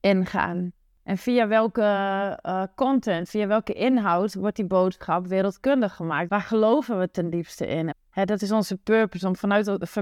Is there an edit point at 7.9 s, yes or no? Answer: yes